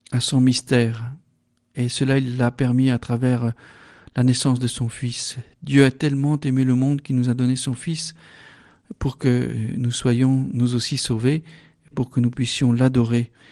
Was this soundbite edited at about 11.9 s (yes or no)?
yes